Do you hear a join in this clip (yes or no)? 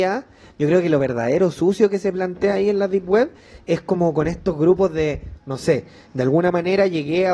no